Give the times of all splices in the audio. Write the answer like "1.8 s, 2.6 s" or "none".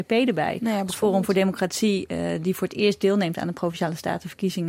none